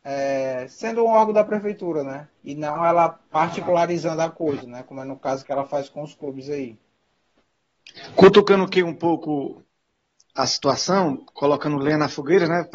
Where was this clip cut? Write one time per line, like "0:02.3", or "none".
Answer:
0:02.4